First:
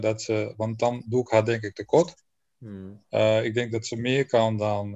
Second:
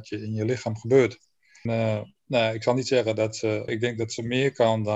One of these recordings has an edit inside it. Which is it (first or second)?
second